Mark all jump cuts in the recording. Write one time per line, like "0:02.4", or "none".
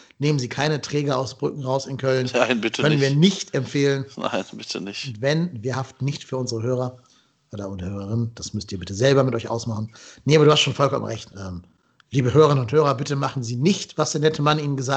0:11.3